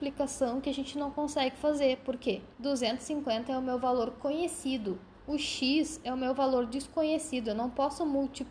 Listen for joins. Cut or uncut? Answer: cut